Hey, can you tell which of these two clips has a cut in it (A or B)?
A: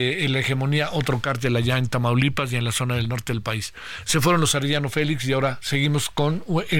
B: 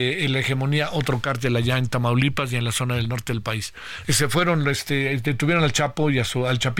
B